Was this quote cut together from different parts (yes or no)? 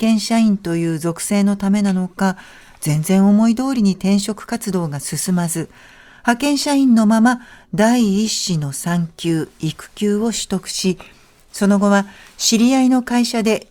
no